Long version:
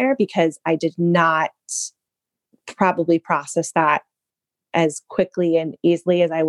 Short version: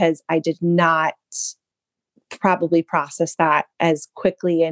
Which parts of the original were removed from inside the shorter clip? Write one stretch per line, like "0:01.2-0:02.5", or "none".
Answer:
0:04.1-0:04.7